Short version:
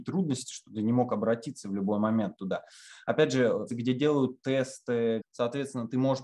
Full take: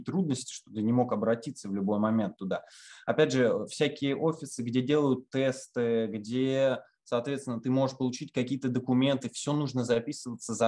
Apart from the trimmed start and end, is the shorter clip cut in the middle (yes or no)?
yes